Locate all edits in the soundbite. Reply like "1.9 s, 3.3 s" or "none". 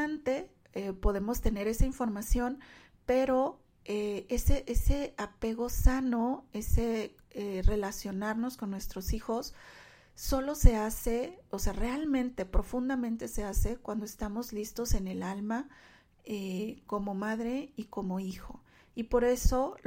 none